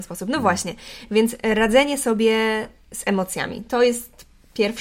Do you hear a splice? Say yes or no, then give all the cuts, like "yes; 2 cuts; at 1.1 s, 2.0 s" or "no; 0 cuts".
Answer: no; 0 cuts